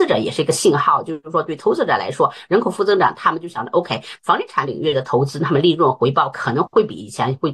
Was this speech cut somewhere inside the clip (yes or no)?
no